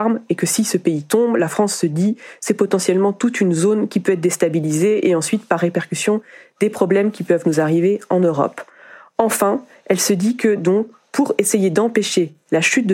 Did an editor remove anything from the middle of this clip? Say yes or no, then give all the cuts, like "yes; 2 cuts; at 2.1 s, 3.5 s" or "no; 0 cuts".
no; 0 cuts